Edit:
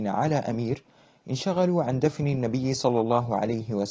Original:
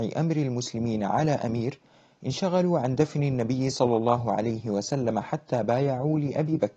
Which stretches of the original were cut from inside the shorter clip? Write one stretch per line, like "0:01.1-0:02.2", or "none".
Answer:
none